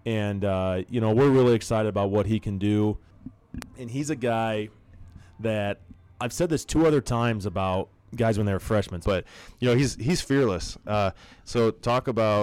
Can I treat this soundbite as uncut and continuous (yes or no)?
no